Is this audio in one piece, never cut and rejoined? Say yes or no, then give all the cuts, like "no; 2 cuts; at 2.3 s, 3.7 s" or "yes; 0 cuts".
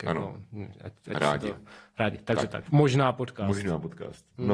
no; 1 cut; at 2.7 s